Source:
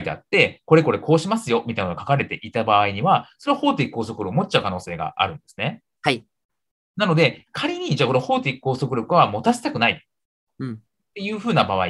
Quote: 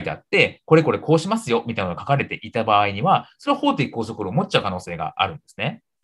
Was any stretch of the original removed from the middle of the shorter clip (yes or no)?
no